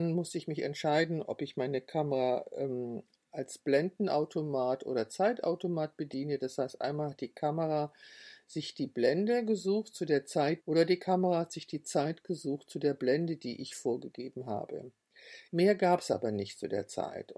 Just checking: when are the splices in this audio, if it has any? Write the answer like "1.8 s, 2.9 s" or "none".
10.6 s, 15.5 s